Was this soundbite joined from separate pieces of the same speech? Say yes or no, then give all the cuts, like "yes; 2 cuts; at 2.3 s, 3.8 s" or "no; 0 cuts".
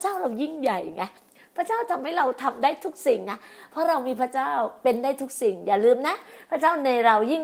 no; 0 cuts